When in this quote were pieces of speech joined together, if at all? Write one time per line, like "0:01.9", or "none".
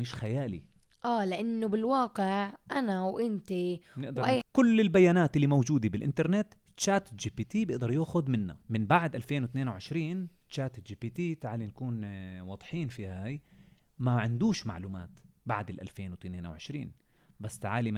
0:04.4
0:08.6